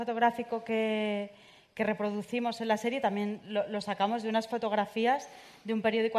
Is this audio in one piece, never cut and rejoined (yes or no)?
yes